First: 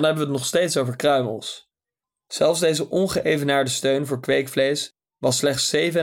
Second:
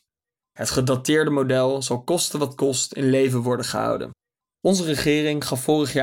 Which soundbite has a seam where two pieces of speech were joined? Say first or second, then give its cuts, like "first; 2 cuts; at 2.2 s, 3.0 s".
second; 1 cut; at 4.5 s